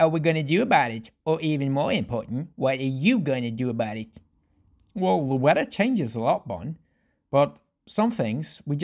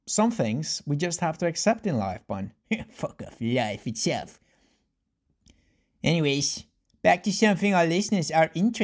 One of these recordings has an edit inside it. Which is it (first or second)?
second